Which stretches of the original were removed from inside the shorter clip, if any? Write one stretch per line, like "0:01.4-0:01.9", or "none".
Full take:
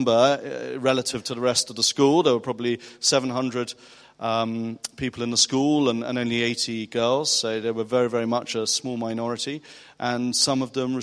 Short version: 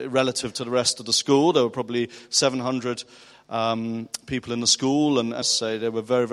0:06.1-0:07.2